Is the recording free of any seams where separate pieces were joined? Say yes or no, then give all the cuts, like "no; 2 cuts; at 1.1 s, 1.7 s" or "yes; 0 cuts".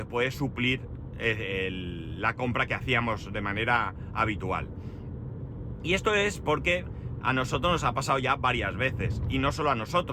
yes; 0 cuts